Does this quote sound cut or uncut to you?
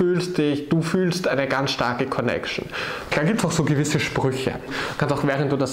cut